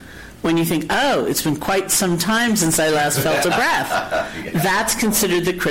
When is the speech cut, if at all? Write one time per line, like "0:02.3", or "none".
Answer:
none